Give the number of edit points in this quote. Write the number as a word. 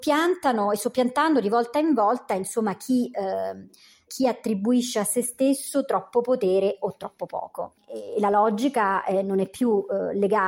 one